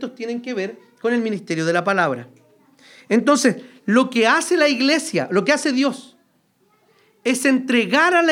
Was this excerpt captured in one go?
yes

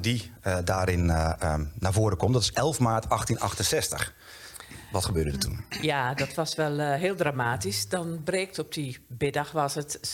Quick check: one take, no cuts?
yes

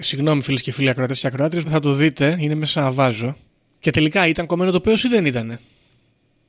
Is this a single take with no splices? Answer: no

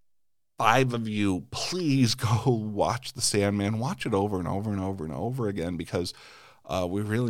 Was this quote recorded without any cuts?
yes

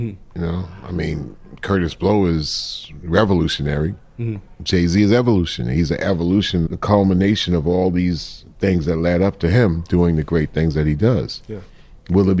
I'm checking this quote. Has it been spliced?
yes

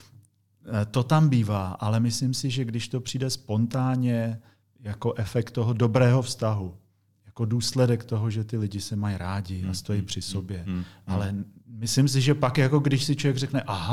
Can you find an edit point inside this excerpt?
no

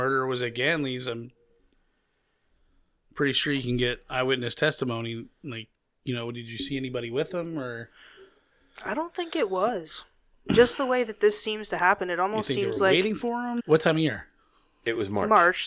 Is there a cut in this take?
yes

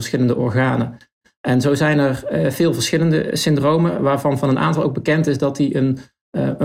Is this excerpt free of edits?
yes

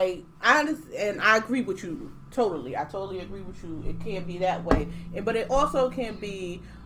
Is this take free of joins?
yes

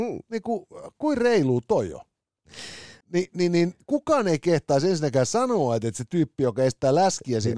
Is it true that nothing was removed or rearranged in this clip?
no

